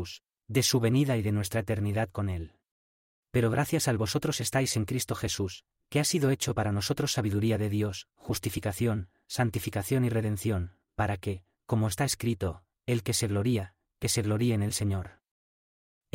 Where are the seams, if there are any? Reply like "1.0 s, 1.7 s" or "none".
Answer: 3.2 s